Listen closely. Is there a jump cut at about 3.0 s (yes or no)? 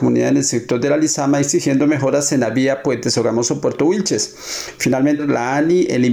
no